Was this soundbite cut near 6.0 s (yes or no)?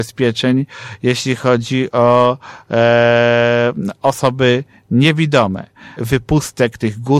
yes